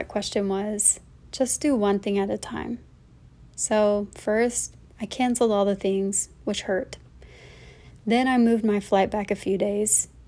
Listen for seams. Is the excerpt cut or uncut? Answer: uncut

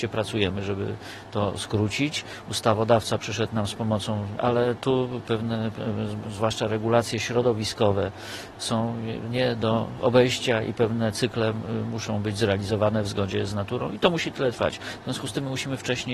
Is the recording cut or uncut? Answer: cut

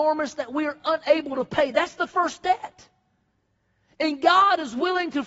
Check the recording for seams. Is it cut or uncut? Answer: uncut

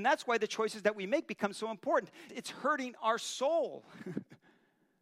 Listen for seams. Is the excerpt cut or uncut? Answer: cut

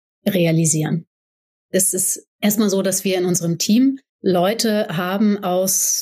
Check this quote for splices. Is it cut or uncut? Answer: cut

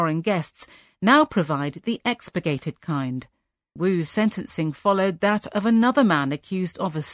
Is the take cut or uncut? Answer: cut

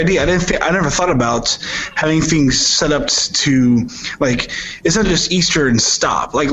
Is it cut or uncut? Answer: uncut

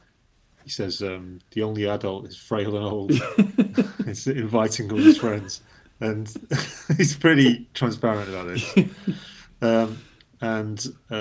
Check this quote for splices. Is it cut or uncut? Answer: uncut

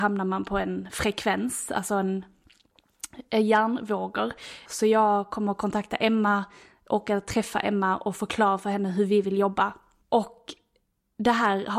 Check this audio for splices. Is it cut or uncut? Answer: cut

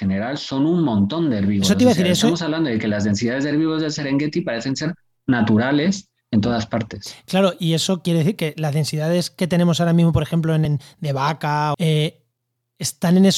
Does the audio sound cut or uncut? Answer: cut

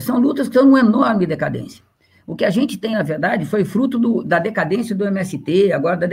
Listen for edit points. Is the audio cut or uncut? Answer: uncut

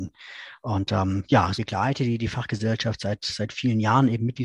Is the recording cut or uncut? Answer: cut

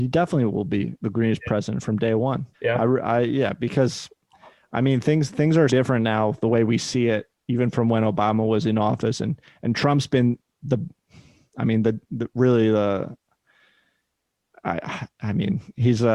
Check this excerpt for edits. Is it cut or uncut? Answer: cut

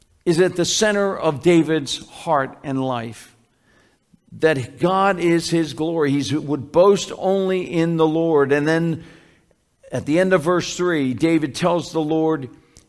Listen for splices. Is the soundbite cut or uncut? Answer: uncut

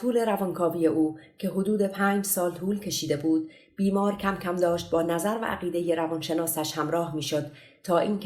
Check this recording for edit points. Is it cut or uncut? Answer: uncut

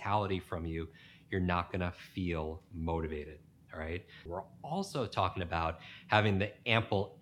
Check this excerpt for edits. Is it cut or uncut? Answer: cut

